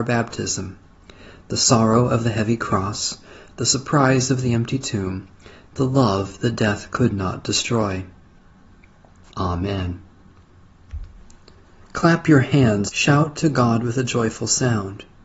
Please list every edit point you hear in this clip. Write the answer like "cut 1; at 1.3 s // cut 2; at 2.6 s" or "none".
cut 1; at 9.3 s // cut 2; at 11.9 s // cut 3; at 12.9 s